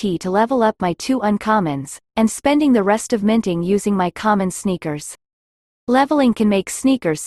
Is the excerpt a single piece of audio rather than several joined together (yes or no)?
yes